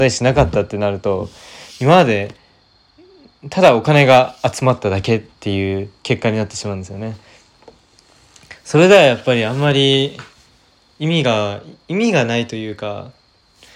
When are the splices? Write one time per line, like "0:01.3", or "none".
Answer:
none